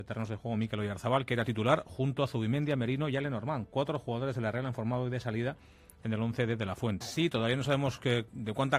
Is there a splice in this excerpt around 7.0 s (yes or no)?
yes